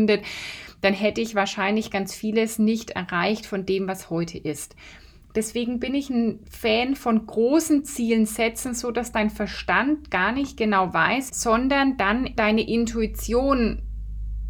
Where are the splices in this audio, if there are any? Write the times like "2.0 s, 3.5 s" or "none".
6.4 s, 11.3 s, 12.4 s